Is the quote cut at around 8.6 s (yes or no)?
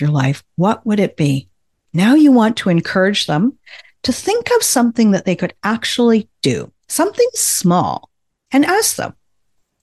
no